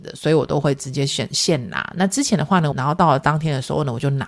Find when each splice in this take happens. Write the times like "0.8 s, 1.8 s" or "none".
2.7 s